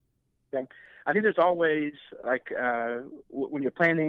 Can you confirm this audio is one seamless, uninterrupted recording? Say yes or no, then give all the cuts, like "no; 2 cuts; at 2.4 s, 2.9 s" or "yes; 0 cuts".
yes; 0 cuts